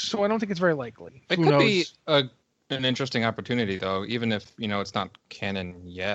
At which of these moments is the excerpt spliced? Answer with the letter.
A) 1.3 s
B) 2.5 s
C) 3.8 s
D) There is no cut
A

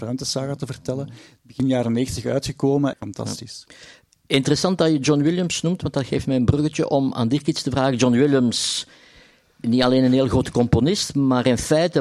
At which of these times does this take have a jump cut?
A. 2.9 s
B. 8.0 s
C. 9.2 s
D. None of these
A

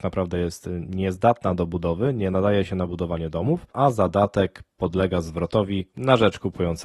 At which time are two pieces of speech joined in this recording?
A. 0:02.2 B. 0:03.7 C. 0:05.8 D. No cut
B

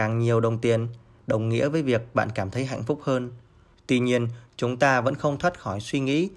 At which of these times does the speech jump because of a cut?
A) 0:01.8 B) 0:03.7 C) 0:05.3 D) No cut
B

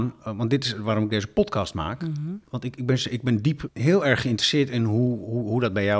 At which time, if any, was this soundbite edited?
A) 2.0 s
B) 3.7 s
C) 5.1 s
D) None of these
B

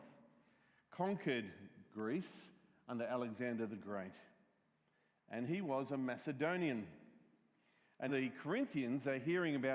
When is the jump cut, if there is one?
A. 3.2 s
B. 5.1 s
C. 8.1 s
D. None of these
C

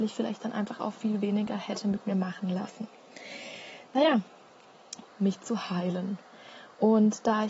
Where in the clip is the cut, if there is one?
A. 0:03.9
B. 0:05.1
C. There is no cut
B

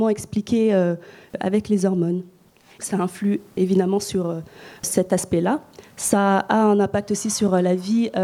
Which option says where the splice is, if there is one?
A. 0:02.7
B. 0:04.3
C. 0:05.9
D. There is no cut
A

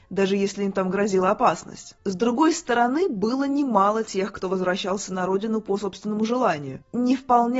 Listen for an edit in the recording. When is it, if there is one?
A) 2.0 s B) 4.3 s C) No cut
A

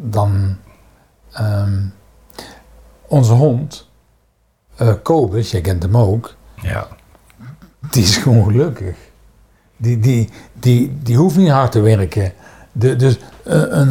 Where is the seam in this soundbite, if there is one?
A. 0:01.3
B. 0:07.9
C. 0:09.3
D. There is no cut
D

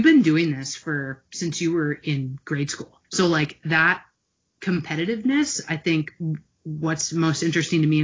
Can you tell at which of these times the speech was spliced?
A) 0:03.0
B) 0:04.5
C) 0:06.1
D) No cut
A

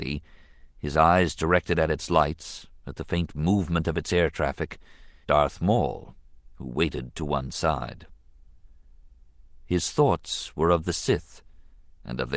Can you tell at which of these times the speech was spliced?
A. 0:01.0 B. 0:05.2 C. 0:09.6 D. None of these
B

